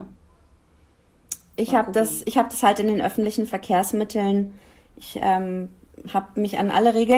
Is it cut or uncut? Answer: uncut